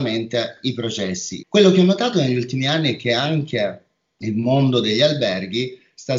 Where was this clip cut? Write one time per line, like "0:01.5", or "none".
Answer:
0:01.4